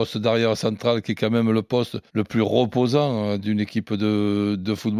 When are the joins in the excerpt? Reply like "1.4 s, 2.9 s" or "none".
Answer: 2.1 s